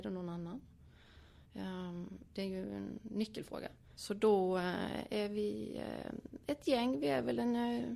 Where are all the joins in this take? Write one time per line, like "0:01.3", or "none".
0:04.0

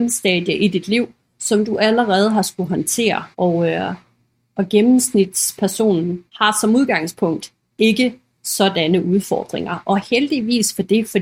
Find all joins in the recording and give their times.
0:03.3
0:06.3

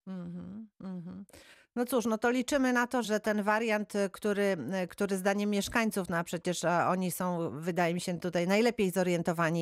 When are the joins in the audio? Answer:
0:03.0

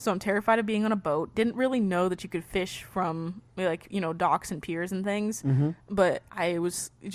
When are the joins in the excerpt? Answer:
none

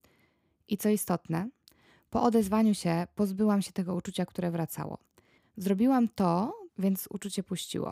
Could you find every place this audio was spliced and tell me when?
0:05.4
0:06.7

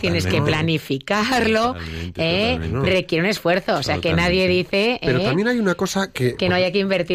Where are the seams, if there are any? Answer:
none

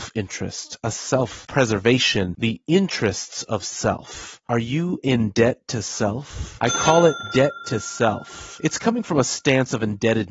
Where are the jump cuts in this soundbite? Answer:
0:06.6

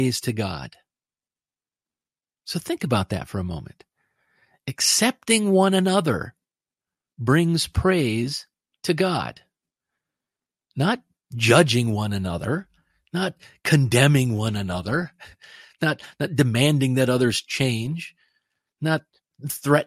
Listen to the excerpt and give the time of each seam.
none

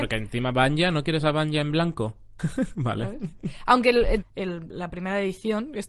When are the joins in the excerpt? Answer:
0:02.4
0:04.2

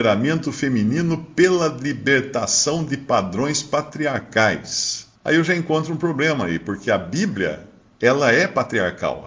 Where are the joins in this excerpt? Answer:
0:05.2

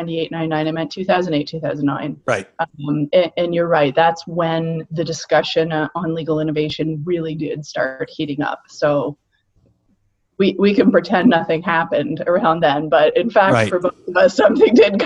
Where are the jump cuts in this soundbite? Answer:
none

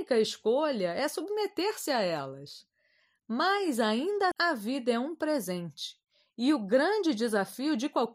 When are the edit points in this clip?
0:04.3

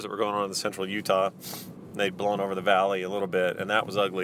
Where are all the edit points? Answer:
none

